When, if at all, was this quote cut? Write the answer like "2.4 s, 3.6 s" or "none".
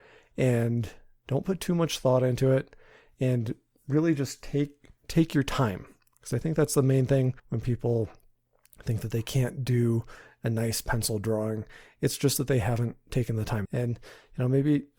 7.4 s, 13.7 s